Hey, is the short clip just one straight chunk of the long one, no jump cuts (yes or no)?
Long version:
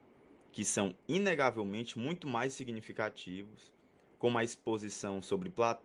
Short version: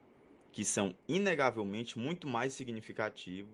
yes